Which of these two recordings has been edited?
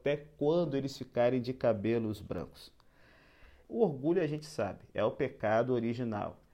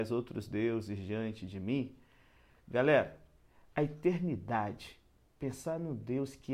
first; 1 cut; at 3.6 s

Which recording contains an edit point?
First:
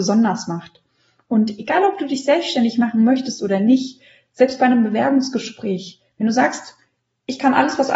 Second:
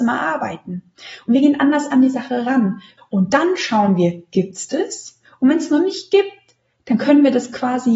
second; 1 cut; at 3.0 s

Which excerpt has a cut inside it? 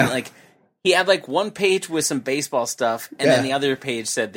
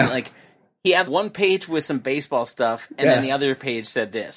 second; 1 cut; at 1.0 s

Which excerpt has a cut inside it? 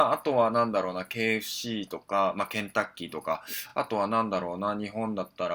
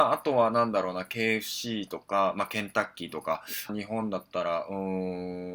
second; 1 cut; at 3.7 s

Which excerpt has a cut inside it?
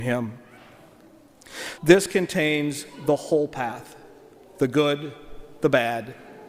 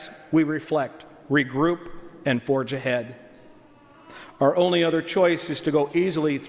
first; 1 cut; at 1.8 s

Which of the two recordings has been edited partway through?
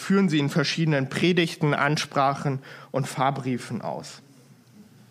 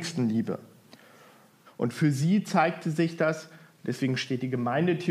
second; 1 cut; at 1.7 s

